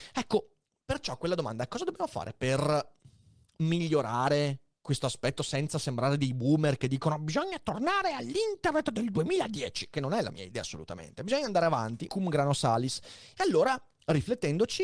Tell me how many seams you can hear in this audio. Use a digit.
1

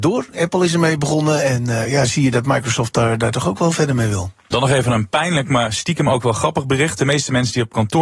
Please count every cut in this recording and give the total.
1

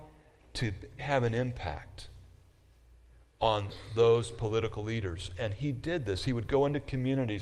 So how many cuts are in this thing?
1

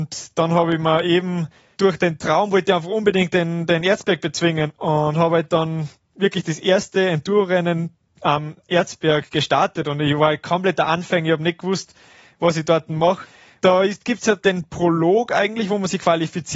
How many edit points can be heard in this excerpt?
0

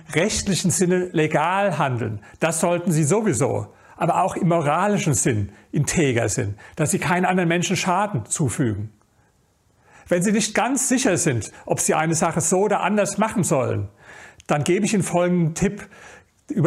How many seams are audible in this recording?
0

